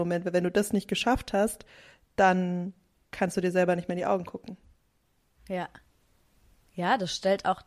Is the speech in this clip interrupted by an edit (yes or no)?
no